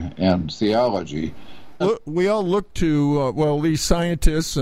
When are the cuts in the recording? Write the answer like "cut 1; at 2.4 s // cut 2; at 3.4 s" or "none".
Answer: cut 1; at 1.8 s

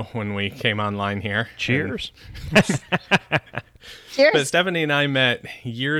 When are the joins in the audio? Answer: none

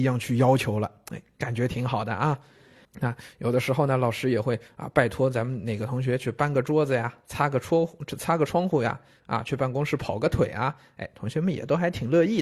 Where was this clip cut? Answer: cut 1; at 2.9 s

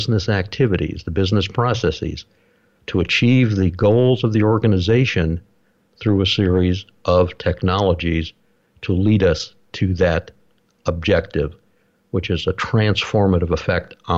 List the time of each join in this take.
none

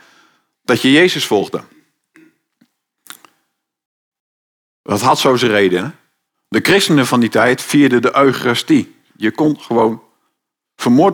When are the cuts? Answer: cut 1; at 6.3 s // cut 2; at 9.1 s

